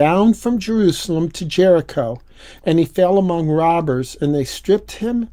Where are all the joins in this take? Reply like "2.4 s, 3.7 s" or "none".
none